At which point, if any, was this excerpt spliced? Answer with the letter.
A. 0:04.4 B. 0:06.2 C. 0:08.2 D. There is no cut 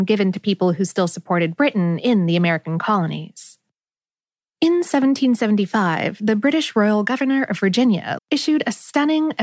C